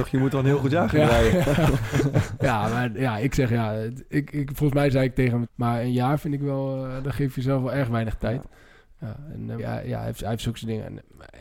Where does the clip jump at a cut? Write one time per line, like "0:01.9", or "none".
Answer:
0:05.4
0:09.6